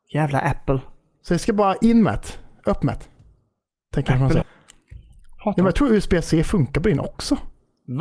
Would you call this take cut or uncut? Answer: cut